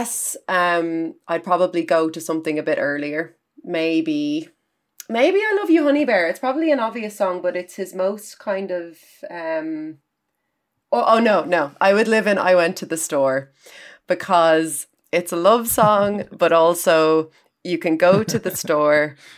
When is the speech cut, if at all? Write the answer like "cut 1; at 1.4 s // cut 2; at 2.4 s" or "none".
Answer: none